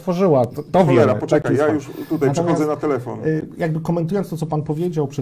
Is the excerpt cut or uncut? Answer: uncut